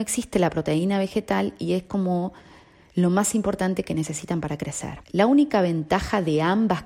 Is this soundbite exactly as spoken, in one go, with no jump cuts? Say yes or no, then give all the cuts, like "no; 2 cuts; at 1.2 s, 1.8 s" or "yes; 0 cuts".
no; 1 cut; at 5.0 s